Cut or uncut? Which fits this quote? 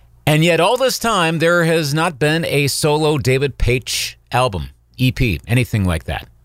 uncut